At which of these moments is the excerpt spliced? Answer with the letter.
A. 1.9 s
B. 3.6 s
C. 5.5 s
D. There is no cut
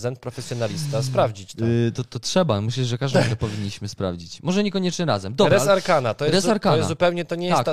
A